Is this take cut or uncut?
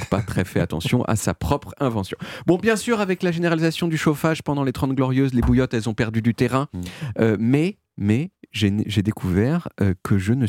uncut